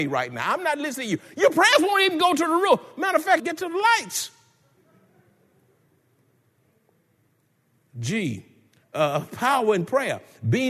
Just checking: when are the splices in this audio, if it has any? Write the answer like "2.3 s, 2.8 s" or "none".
3.4 s